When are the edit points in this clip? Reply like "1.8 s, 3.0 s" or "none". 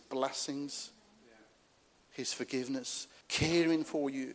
3.2 s